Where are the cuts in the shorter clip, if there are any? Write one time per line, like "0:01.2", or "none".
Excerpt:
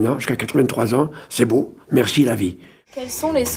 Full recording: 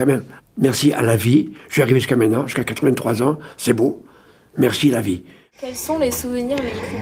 0:01.8